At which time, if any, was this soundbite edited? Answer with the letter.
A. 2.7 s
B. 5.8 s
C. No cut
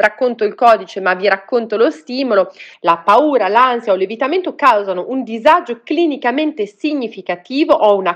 A